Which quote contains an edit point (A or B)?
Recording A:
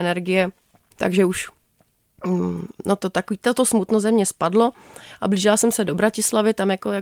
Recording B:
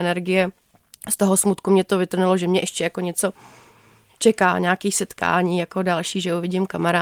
A